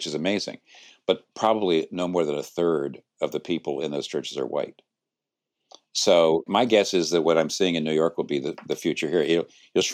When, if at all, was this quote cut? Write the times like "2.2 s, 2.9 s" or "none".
6.5 s